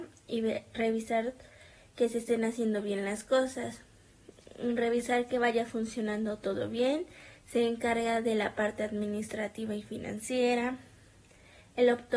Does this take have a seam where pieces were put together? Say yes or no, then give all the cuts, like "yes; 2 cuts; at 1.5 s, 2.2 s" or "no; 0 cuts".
no; 0 cuts